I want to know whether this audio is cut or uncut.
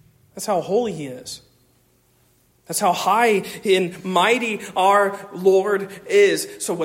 uncut